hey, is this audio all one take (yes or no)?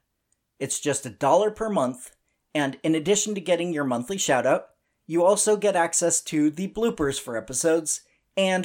yes